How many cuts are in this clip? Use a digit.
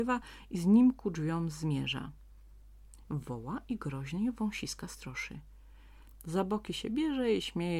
2